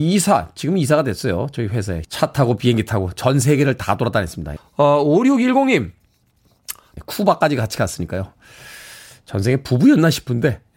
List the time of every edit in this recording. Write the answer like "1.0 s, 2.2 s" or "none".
2.0 s, 4.6 s, 7.0 s